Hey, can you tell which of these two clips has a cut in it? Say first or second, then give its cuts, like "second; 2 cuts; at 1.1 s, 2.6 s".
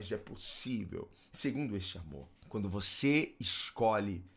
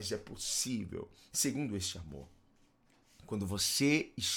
first; 1 cut; at 2.4 s